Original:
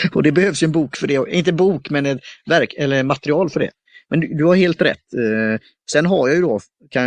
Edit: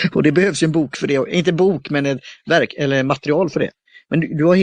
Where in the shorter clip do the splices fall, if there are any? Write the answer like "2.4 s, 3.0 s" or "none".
none